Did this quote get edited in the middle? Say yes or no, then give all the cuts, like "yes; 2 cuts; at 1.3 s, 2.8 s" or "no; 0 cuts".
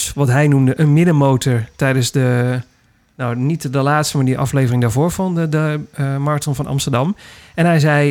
no; 0 cuts